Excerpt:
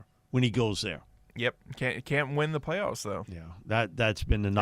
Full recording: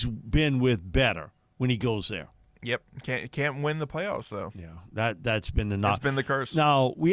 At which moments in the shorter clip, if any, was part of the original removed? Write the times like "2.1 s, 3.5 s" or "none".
none